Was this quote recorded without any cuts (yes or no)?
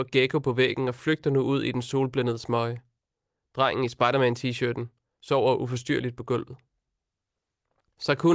yes